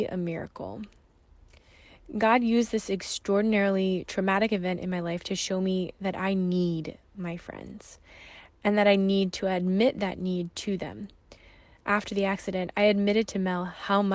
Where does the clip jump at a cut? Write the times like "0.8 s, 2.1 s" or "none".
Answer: none